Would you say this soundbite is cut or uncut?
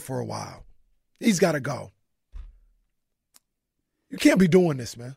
uncut